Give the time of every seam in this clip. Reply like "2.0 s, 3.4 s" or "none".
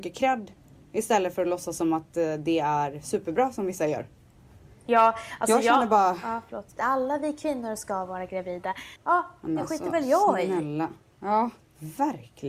6.8 s, 9.0 s